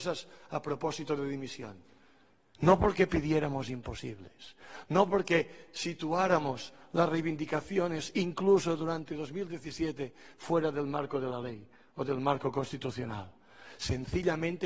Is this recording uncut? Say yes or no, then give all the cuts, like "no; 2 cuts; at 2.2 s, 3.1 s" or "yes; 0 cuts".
no; 1 cut; at 2.5 s